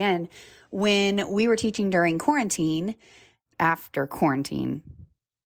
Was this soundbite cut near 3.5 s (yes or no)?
yes